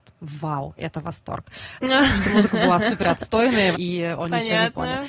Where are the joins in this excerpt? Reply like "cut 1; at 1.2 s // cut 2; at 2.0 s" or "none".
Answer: cut 1; at 1.8 s // cut 2; at 3.7 s